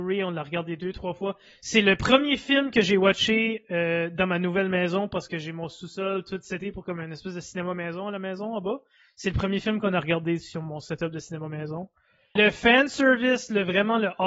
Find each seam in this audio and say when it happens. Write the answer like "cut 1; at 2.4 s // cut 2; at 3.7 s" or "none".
cut 1; at 12.4 s